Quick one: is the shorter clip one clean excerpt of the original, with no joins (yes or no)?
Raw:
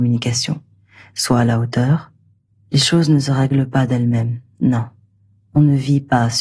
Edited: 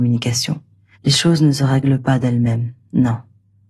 no